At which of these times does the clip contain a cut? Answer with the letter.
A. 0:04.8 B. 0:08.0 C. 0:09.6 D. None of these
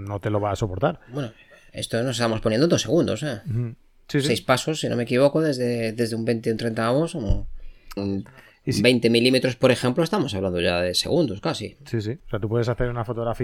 B